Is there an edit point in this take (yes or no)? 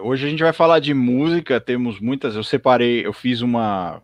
no